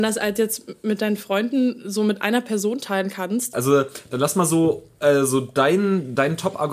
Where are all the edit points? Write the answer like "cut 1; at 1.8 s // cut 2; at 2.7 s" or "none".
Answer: cut 1; at 3.5 s